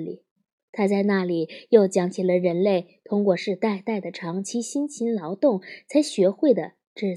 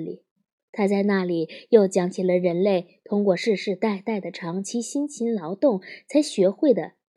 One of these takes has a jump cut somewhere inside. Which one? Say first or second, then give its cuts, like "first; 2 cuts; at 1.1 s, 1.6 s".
first; 1 cut; at 3.4 s